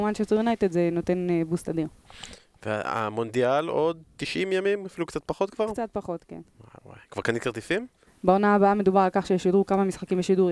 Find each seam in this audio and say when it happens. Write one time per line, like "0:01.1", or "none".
0:08.1